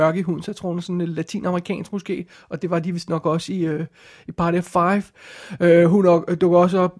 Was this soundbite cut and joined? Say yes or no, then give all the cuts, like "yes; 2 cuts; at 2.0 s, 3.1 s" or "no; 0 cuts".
no; 0 cuts